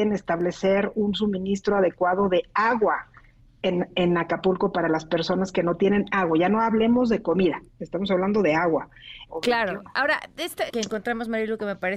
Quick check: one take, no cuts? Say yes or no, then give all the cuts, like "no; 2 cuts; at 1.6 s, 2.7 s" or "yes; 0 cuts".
no; 2 cuts; at 9.3 s, 10.7 s